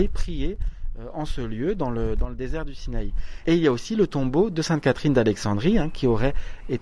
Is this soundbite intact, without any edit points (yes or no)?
no